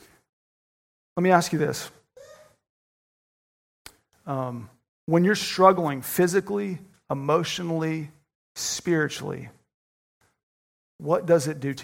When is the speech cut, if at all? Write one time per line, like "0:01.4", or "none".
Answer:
0:06.9